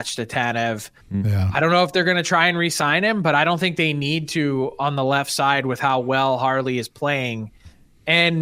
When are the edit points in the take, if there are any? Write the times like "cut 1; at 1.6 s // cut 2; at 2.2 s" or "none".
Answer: cut 1; at 1.0 s